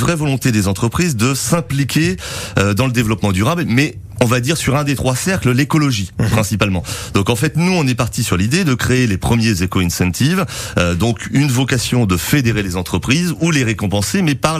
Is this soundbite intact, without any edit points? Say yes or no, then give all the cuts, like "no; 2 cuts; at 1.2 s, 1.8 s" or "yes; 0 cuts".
yes; 0 cuts